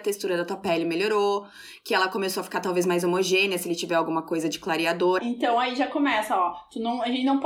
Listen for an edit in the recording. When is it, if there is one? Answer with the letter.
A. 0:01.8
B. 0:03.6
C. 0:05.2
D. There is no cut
C